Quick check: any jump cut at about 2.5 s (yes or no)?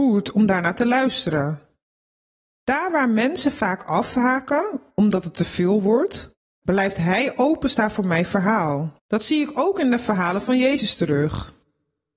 no